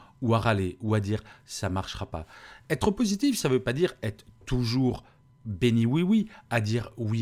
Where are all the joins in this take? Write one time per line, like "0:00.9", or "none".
none